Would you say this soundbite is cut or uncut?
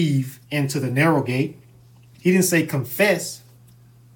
uncut